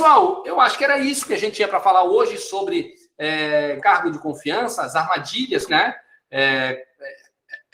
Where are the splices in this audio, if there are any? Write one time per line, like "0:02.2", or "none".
0:03.8
0:05.7